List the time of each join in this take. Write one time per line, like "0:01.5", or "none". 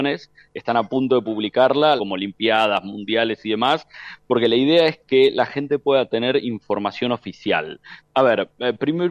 0:02.0
0:08.0